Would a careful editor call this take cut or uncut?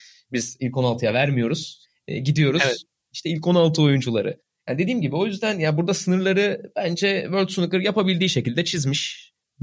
cut